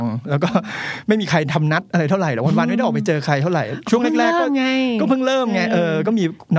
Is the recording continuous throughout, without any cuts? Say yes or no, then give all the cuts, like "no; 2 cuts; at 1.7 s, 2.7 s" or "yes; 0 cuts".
yes; 0 cuts